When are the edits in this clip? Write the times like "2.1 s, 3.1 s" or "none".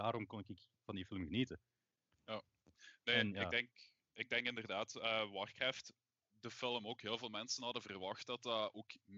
none

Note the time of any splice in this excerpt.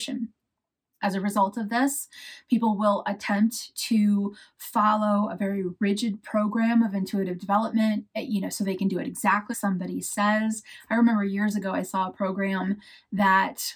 9.5 s

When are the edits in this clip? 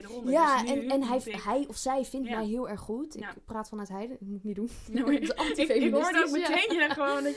none

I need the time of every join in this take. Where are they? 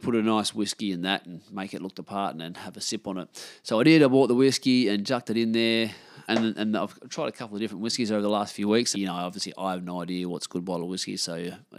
6.3 s, 8.9 s

